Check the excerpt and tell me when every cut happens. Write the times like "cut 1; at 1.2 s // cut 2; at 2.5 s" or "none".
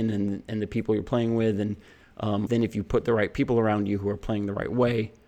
cut 1; at 2.5 s

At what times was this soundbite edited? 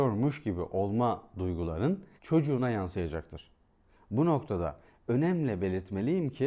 cut 1; at 2.2 s

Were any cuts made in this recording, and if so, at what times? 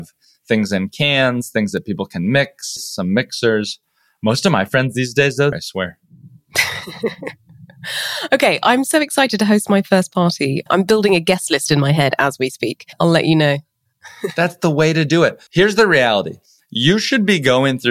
cut 1; at 2.8 s // cut 2; at 5.5 s // cut 3; at 15.5 s

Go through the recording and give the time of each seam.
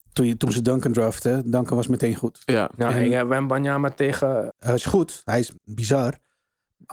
cut 1; at 4.5 s // cut 2; at 5.6 s

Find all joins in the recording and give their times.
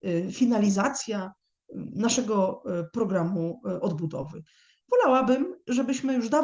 none

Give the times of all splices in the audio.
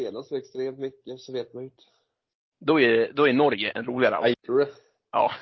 cut 1; at 2.5 s // cut 2; at 4.3 s

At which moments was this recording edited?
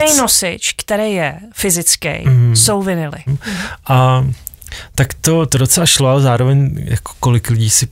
cut 1; at 3.3 s

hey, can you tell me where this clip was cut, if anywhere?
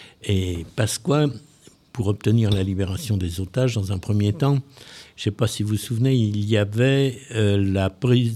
none

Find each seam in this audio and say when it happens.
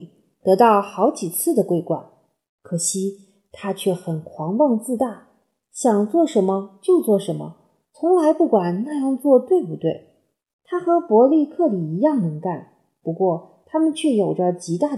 cut 1; at 10.5 s

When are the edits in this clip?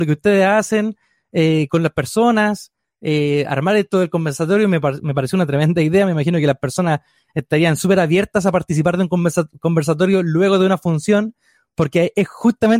none

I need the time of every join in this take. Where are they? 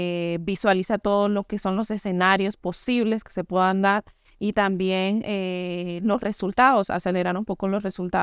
none

